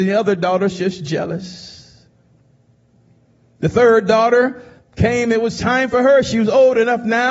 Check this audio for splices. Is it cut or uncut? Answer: uncut